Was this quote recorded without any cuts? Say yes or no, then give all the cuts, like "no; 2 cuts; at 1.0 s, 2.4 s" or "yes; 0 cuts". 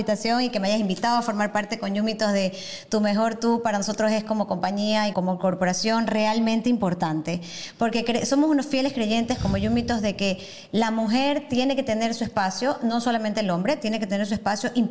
no; 1 cut; at 5.1 s